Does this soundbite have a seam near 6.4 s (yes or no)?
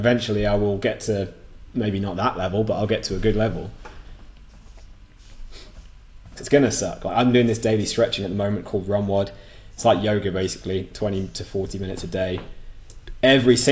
yes